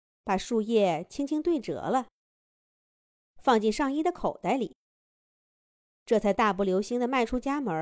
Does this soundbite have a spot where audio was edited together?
no; 0 cuts

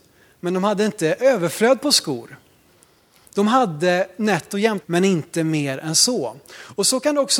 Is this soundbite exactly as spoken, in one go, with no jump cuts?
no; 1 cut; at 4.8 s

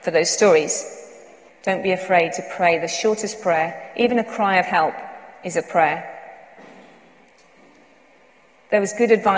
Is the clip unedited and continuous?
no; 1 cut; at 1.5 s

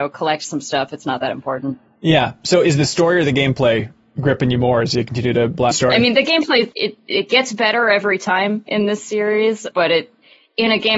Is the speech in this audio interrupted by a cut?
yes; 3 cuts; at 5.7 s, 6.7 s, 9.7 s

